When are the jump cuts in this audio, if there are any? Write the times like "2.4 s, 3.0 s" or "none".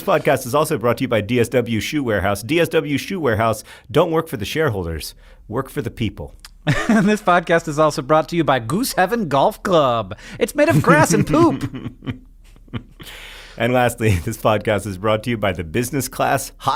none